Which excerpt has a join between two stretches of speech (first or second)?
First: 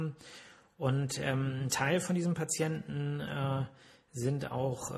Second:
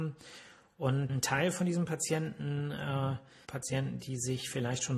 second